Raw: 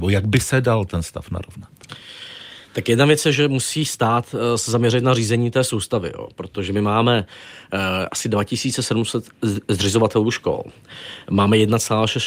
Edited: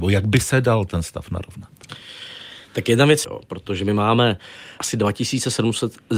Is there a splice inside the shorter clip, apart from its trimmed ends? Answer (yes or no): yes